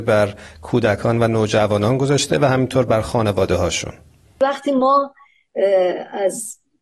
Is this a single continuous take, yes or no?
yes